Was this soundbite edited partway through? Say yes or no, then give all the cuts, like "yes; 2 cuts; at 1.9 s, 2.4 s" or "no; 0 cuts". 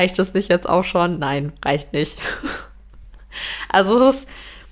no; 0 cuts